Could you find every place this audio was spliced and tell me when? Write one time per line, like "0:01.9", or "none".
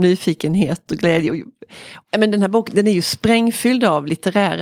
none